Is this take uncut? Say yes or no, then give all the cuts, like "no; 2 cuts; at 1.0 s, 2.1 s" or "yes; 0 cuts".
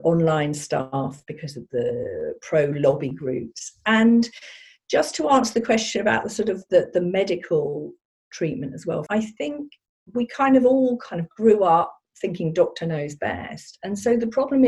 no; 1 cut; at 9.1 s